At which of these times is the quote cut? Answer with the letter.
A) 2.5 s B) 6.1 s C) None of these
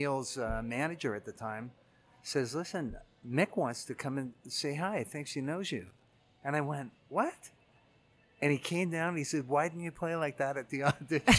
C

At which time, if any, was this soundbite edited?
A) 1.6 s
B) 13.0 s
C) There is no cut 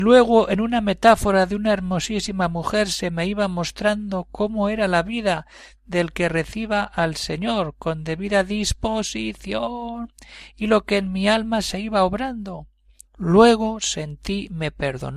B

